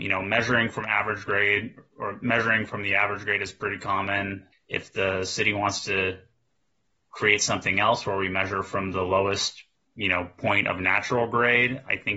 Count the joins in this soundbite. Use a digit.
1